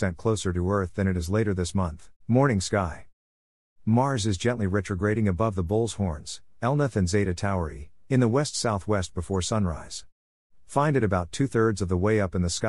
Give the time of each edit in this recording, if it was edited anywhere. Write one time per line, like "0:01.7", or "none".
0:02.2

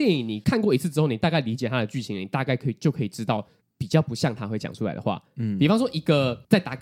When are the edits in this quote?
0:03.6

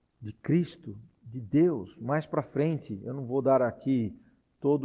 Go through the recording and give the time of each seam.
none

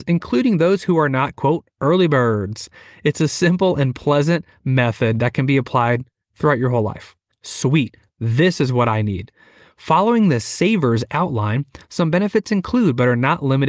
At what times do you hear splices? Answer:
0:07.3

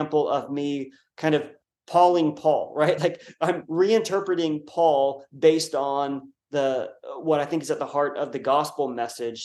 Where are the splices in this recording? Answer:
none

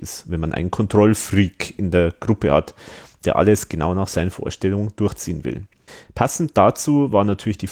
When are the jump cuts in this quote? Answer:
0:06.0

